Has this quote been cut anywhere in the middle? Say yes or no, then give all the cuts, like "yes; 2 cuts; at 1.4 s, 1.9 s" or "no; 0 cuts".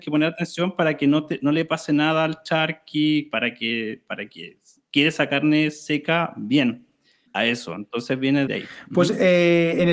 yes; 2 cuts; at 7.3 s, 8.5 s